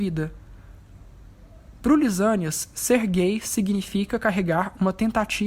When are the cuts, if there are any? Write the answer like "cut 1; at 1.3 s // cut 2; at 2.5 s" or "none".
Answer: none